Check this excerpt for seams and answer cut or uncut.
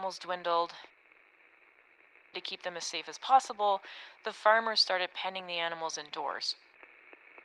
uncut